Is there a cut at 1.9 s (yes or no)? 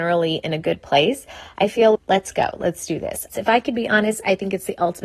yes